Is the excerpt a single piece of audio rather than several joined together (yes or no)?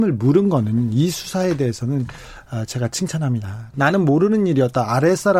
no